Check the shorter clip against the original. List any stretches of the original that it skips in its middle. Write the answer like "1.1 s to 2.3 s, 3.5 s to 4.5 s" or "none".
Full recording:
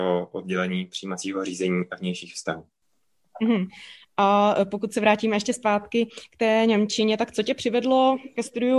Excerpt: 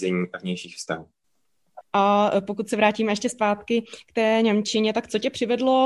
3.4 s to 4.0 s